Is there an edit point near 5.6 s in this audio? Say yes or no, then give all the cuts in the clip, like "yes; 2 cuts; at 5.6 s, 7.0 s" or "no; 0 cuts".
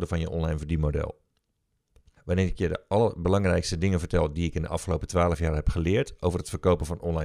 no; 1 cut; at 2.2 s